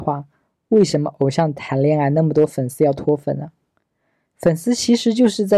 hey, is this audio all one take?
yes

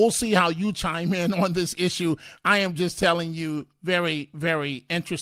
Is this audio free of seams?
yes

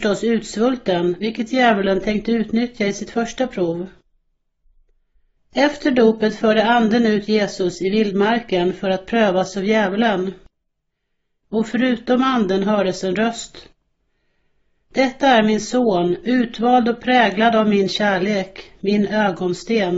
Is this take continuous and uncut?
no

